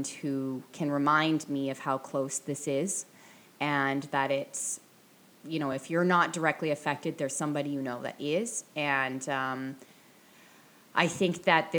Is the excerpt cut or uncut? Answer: uncut